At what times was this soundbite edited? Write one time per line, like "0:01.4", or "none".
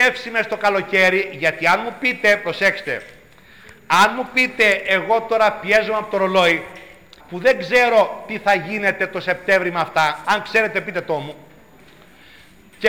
0:07.2
0:10.2